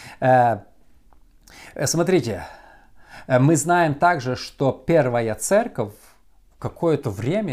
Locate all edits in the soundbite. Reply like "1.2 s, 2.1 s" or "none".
none